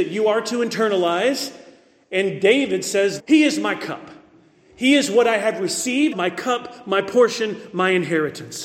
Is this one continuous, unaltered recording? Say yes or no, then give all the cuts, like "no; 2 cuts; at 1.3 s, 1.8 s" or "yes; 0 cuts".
no; 2 cuts; at 3.2 s, 6.1 s